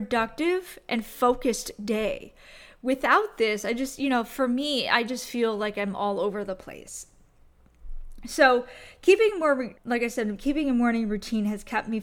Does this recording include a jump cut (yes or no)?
no